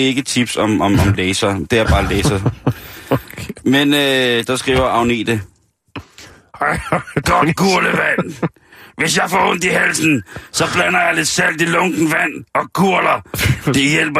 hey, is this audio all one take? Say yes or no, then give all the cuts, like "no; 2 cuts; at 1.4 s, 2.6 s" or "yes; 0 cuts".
yes; 0 cuts